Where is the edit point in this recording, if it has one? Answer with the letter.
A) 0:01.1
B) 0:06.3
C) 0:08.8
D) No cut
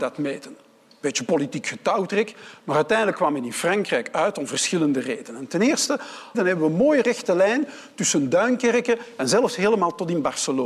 B